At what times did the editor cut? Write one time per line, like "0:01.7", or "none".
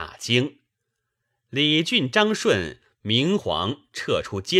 0:03.4